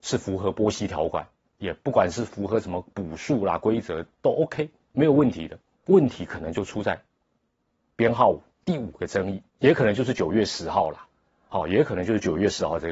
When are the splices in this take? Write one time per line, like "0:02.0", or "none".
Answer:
0:05.7